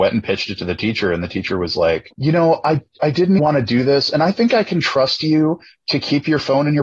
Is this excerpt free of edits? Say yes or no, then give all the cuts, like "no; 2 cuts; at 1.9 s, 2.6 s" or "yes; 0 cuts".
no; 2 cuts; at 2.1 s, 3.4 s